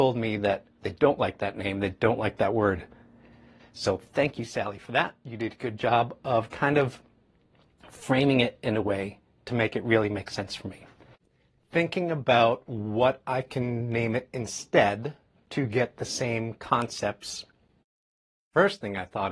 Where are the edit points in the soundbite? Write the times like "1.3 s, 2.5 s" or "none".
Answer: 3.6 s